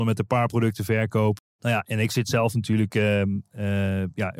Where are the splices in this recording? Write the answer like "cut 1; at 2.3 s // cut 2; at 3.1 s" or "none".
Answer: cut 1; at 1.4 s